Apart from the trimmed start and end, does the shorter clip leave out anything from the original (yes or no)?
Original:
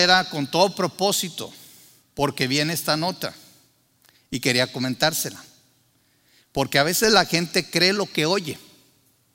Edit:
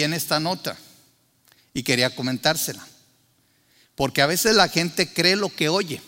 no